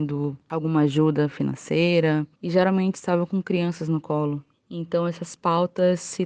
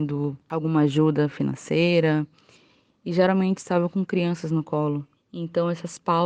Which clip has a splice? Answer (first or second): first